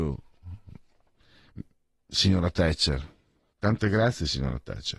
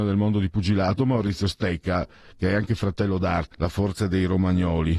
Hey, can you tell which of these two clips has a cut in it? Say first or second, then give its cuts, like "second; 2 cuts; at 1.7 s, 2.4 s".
second; 1 cut; at 3.5 s